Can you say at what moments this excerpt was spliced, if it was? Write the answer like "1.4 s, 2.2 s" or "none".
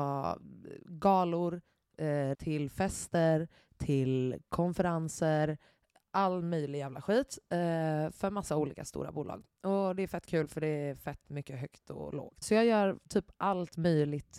2.3 s, 12.4 s